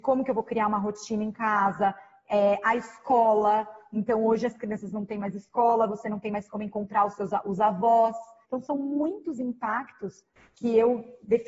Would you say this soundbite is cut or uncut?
cut